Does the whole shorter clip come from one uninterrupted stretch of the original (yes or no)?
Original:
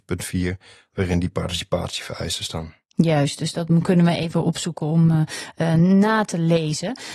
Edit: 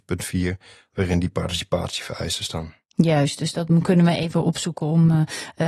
yes